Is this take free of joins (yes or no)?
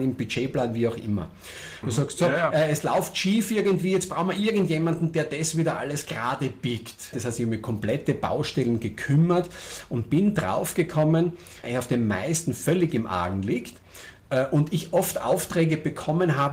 no